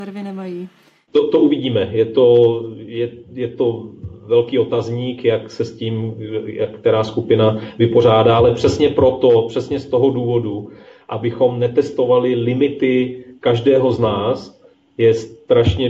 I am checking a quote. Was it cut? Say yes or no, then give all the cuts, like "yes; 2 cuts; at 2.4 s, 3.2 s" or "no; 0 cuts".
no; 0 cuts